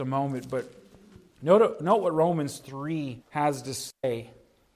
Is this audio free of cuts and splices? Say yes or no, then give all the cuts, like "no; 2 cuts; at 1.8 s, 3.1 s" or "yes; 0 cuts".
no; 1 cut; at 3.2 s